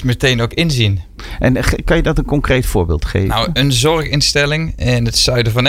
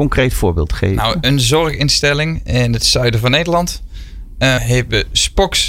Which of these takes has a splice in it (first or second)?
second